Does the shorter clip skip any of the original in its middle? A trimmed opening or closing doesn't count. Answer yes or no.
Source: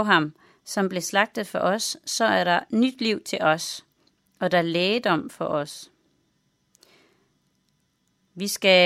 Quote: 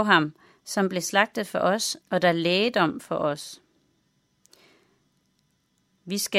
yes